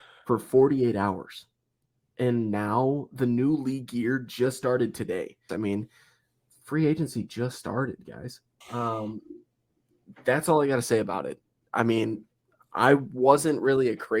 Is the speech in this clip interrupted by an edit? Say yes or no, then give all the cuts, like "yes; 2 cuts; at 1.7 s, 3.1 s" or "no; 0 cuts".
yes; 2 cuts; at 5.5 s, 8.6 s